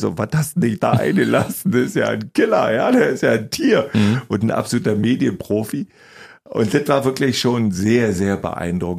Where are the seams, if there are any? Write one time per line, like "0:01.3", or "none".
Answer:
none